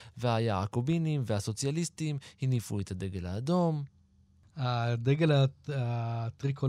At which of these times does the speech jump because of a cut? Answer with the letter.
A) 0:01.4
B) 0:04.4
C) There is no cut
B